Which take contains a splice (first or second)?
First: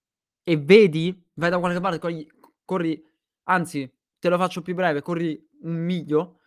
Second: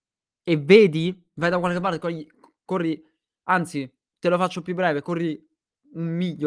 first